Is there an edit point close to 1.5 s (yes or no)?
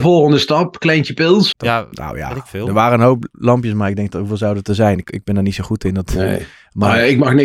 yes